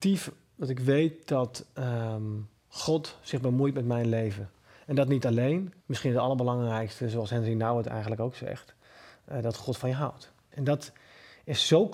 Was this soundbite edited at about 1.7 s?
no; 2 cuts; at 5.8 s, 10.5 s

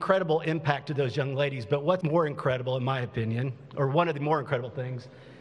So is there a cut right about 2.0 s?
yes; 1 cut; at 2.0 s

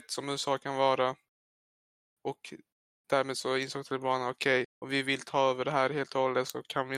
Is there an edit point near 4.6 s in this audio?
yes; 1 cut; at 4.6 s

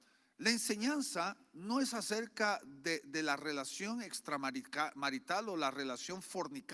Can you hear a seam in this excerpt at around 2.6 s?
no; 0 cuts

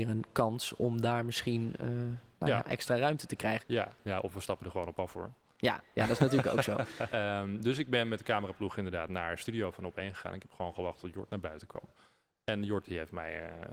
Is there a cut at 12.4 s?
no; 2 cuts; at 3.6 s, 7.1 s

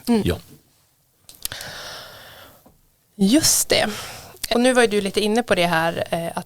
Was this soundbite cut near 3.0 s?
no; 1 cut; at 4.5 s

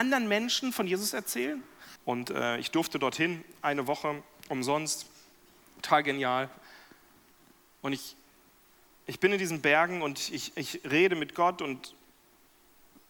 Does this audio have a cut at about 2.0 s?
yes; 1 cut; at 2.0 s

